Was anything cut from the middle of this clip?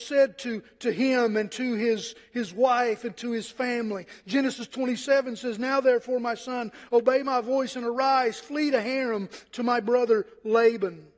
no; 0 cuts

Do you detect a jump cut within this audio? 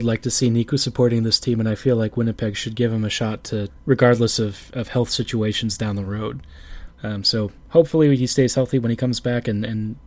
yes; 2 cuts; at 3.7 s, 6.9 s

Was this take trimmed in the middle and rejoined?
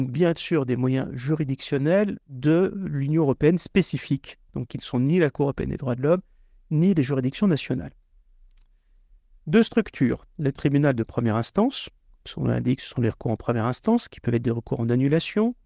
no; 0 cuts

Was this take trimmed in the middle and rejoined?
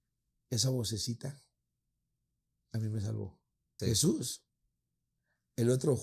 yes; 1 cut; at 3.8 s

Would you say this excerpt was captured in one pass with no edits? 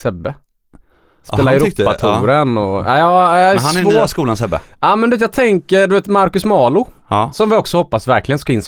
yes; 0 cuts

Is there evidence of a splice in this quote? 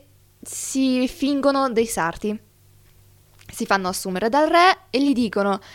no; 0 cuts

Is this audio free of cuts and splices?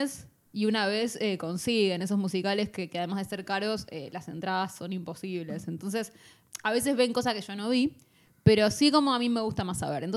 yes; 0 cuts

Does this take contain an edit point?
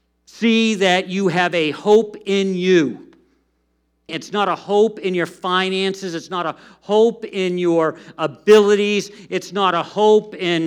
yes; 1 cut; at 4.1 s

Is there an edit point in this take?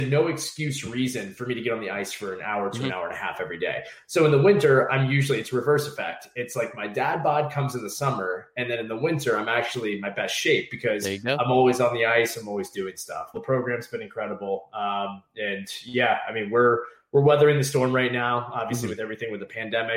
yes; 1 cut; at 13.3 s

